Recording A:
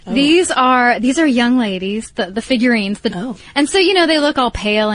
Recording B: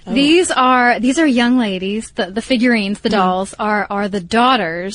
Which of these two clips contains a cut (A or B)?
A